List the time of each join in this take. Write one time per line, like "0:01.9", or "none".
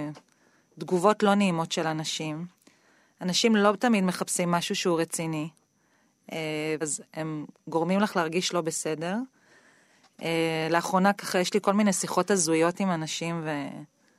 0:06.8